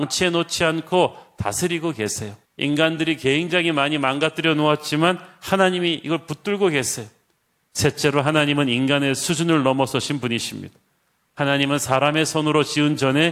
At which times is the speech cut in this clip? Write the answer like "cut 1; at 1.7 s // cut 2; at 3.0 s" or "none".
cut 1; at 2.5 s // cut 2; at 7.6 s